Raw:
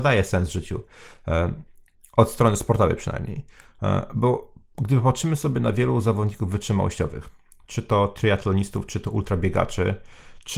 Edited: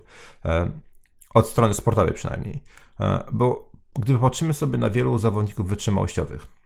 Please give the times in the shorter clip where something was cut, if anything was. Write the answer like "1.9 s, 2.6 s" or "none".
none